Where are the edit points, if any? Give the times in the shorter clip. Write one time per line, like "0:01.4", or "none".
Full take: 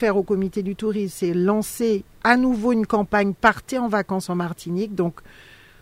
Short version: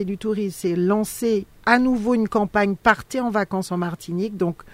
none